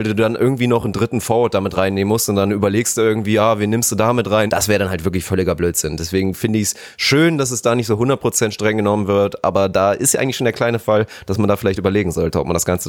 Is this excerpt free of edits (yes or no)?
no